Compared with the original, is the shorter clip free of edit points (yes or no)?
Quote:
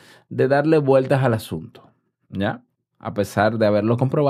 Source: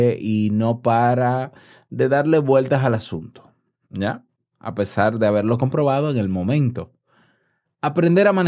yes